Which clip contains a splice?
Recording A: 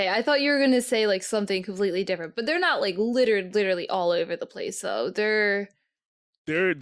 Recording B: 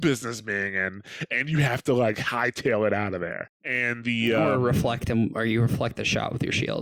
B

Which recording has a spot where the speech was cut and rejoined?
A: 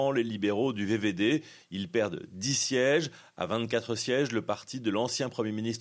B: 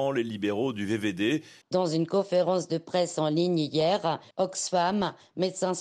B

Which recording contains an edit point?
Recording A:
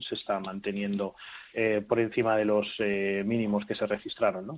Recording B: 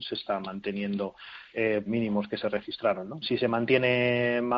B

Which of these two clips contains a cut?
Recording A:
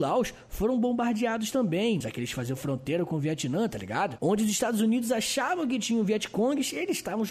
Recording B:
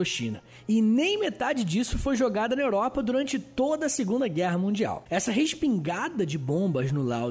A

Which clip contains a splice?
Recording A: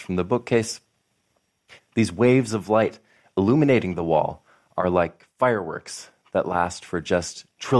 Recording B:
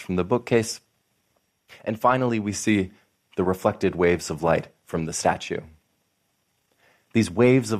A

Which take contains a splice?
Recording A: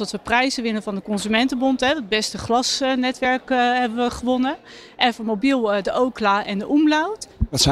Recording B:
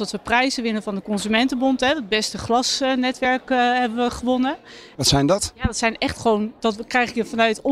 B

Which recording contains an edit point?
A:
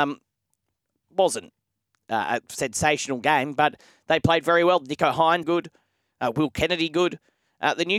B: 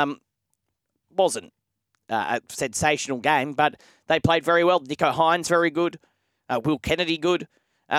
A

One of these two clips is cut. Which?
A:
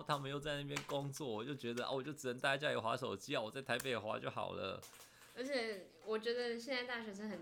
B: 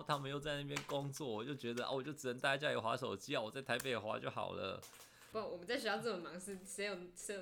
B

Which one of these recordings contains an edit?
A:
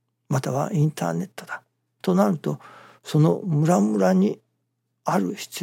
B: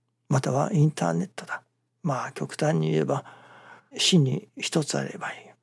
B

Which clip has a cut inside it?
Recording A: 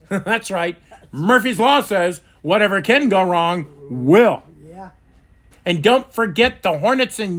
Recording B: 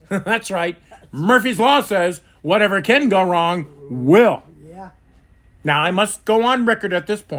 A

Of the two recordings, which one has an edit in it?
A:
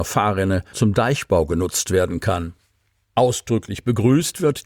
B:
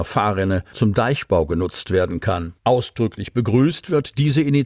B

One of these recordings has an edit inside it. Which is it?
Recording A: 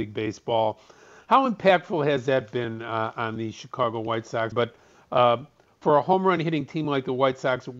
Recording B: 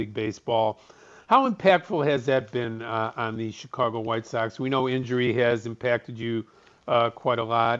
A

